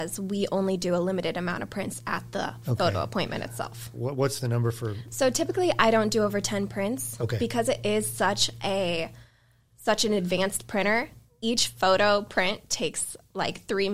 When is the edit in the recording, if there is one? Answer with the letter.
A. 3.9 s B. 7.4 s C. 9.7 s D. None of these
A